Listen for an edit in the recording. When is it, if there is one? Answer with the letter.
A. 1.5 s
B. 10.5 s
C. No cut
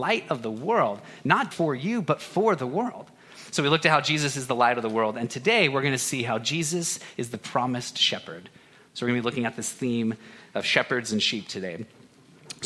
A